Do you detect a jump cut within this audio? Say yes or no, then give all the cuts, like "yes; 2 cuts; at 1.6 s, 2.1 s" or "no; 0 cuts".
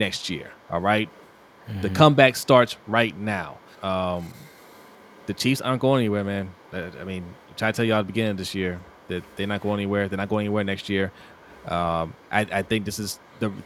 yes; 1 cut; at 3.7 s